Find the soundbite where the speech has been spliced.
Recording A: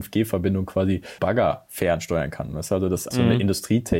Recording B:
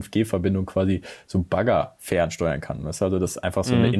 A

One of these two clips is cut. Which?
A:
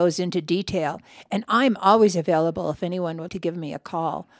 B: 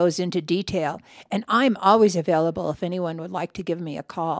A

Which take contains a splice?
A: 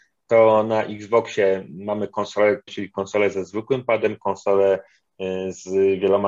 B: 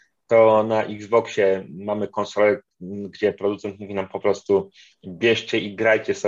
A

